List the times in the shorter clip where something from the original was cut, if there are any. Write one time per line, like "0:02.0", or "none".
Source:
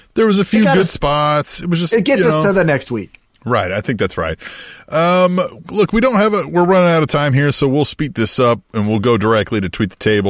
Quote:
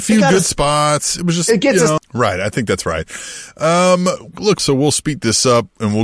0:02.0
0:04.6